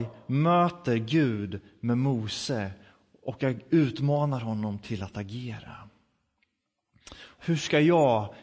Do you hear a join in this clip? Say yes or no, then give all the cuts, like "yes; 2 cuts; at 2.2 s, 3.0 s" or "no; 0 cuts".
yes; 1 cut; at 7.4 s